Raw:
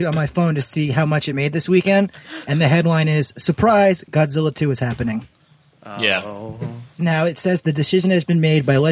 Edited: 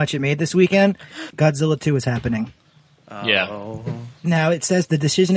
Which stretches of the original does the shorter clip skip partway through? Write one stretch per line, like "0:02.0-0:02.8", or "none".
0:02.4-0:04.0

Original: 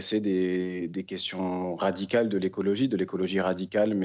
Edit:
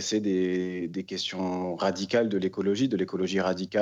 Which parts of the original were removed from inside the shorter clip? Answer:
none

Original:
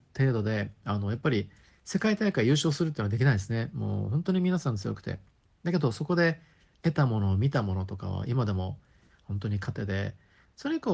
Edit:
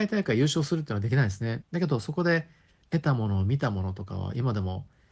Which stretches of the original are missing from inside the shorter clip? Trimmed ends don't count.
0:03.7-0:05.5

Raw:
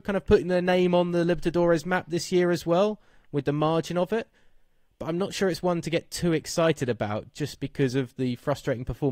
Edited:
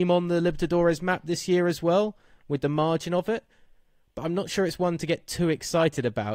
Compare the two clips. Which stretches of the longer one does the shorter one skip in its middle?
none

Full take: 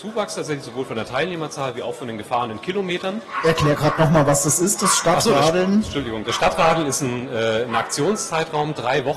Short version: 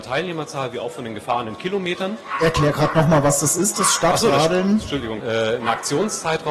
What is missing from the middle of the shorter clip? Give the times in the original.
0:06.2-0:07.3

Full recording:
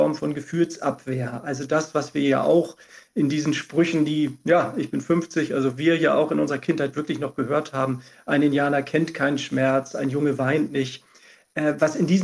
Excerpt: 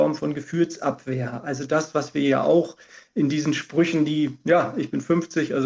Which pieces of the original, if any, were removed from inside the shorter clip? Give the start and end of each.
none

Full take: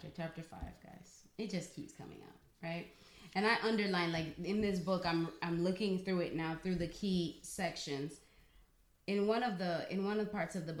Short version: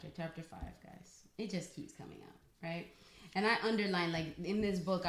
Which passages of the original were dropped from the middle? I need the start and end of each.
none

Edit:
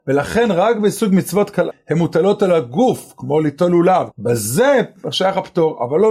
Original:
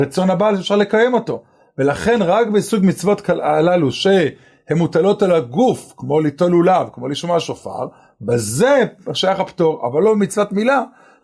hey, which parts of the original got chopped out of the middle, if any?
0:03.4-0:04.5
0:06.9-0:08.1

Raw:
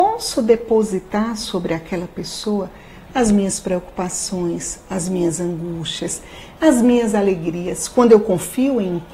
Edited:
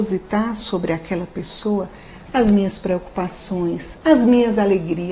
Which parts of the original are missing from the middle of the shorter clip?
0:04.8-0:06.6

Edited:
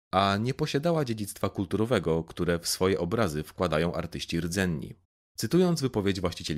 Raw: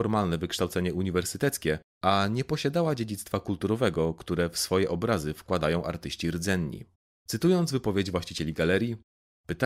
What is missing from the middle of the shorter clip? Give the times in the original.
none

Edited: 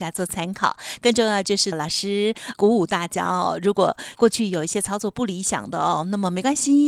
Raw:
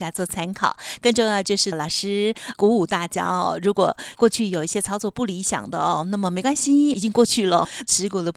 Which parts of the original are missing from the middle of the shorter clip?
none

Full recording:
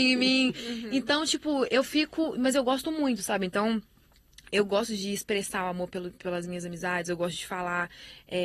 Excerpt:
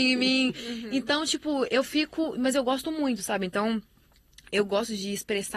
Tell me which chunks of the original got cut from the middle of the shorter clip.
none

